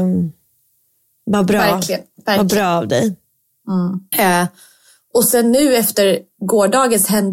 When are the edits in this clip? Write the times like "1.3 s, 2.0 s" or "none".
4.1 s